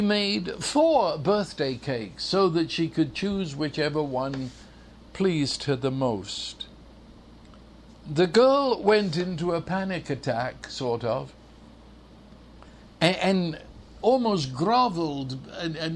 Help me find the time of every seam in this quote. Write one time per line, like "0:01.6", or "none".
none